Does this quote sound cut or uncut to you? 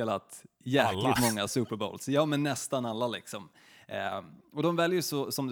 uncut